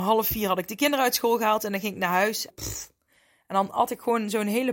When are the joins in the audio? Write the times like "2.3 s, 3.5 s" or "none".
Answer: 2.5 s